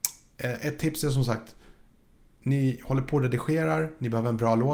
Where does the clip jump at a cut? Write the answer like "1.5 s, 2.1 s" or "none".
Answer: none